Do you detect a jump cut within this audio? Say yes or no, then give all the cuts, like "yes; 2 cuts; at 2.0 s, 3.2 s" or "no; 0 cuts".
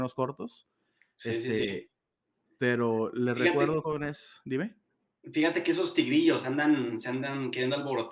no; 0 cuts